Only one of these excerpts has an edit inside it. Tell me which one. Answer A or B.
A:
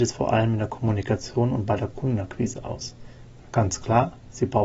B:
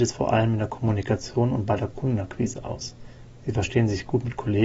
A